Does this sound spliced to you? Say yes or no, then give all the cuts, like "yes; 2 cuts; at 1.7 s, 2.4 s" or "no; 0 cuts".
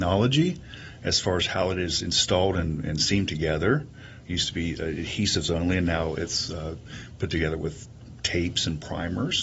no; 0 cuts